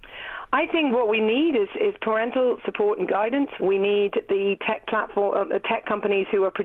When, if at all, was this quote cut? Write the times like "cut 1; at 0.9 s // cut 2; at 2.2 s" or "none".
cut 1; at 3.6 s